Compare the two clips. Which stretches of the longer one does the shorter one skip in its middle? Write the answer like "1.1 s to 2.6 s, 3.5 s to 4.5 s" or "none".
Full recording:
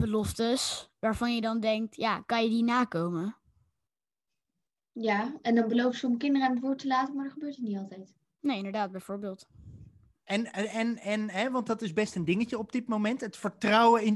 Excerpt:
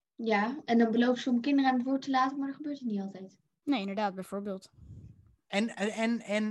none